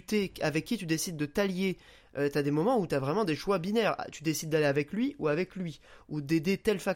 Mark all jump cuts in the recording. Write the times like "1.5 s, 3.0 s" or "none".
none